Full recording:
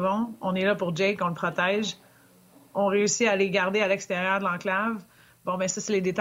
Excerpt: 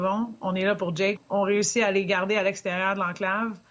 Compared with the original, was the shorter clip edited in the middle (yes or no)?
yes